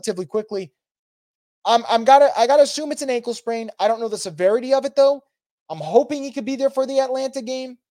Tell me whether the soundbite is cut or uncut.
uncut